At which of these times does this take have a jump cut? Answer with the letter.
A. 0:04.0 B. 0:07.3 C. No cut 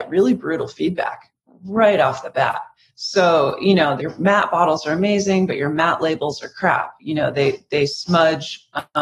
A